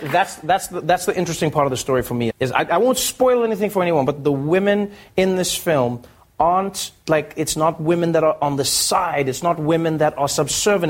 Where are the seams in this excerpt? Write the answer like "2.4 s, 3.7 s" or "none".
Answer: 2.3 s, 4.2 s